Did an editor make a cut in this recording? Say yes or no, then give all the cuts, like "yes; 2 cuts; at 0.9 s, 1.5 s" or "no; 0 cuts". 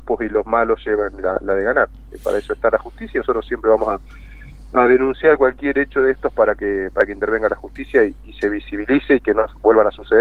no; 0 cuts